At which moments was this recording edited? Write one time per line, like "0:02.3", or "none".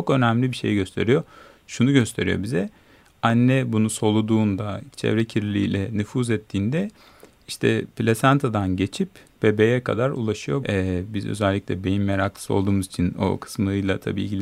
0:10.6